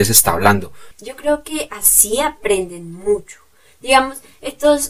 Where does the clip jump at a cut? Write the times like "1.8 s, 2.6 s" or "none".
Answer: 0.9 s